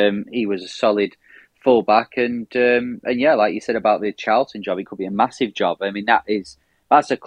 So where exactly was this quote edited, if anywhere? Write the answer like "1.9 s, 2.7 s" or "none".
none